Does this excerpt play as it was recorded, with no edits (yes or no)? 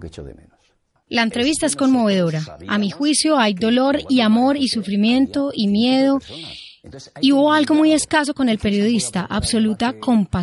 yes